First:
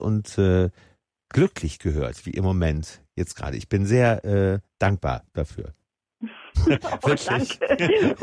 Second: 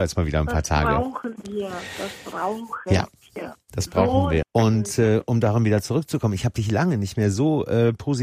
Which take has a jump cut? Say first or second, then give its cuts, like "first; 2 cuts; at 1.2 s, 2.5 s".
second; 1 cut; at 4.4 s